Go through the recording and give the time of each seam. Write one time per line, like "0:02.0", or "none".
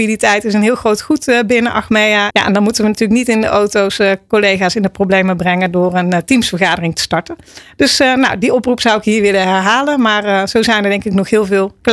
0:02.3